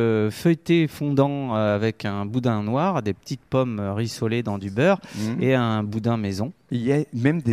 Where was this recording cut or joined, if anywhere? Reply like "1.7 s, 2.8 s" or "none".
none